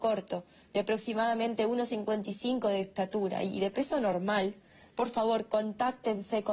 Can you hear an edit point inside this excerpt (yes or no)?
no